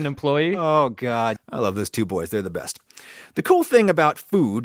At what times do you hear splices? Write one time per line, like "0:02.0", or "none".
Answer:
0:01.4